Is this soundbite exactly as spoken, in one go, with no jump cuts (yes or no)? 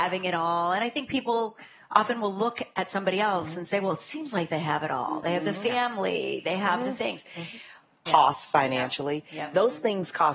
no